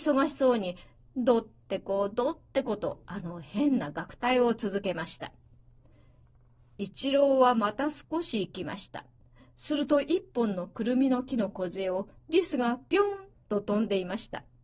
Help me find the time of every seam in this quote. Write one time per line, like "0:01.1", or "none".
none